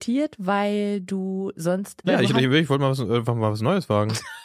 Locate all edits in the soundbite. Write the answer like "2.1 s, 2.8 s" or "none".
2.0 s